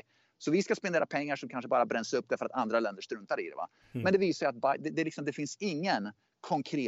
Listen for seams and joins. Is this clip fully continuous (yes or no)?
yes